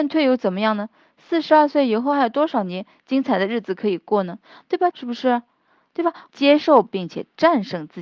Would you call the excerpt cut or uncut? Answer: cut